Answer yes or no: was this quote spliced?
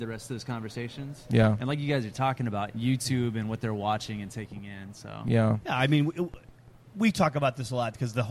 yes